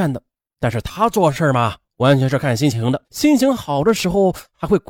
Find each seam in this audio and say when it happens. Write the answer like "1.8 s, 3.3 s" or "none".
3.0 s